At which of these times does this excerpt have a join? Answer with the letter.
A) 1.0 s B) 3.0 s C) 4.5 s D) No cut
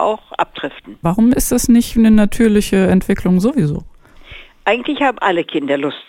A